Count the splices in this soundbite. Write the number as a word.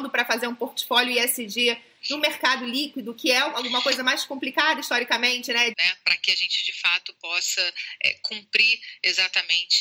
one